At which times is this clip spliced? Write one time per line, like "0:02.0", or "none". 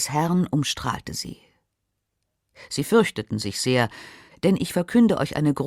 0:04.3